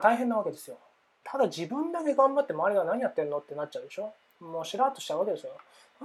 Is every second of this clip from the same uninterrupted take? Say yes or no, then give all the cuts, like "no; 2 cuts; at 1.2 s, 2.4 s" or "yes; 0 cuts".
no; 1 cut; at 1.2 s